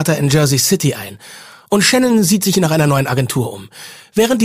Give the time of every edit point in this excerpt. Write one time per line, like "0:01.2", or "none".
none